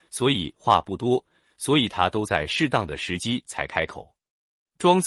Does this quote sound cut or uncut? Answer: cut